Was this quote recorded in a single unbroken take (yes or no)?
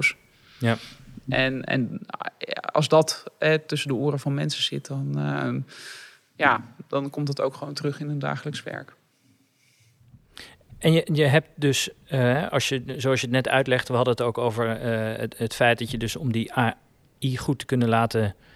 yes